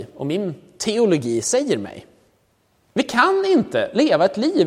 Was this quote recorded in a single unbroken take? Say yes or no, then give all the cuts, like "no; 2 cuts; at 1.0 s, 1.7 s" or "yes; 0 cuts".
no; 1 cut; at 2.9 s